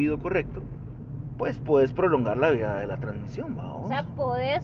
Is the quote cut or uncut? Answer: uncut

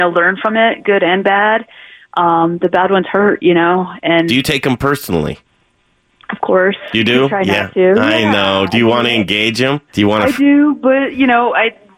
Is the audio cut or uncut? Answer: cut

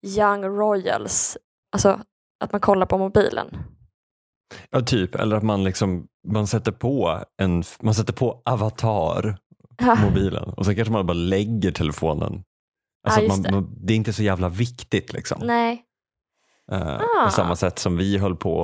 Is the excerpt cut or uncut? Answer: uncut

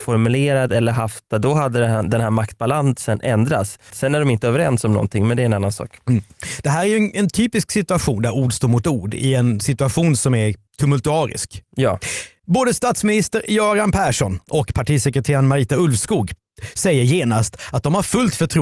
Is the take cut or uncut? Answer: cut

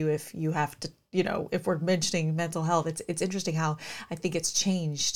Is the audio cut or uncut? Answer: uncut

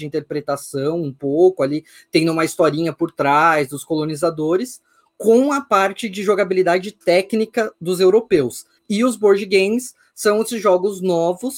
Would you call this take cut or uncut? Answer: cut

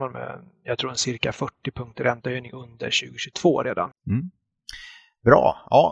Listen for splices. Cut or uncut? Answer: cut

